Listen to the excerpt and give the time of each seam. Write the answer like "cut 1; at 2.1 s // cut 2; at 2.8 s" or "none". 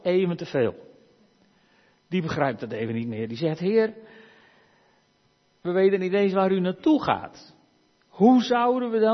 none